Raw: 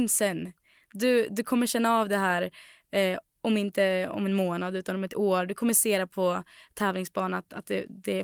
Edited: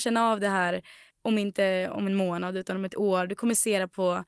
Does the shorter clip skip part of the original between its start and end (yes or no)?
yes